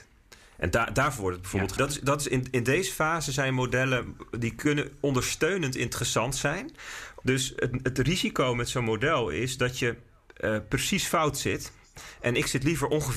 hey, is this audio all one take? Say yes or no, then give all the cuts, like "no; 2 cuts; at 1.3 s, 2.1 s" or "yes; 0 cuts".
no; 2 cuts; at 1.8 s, 7.2 s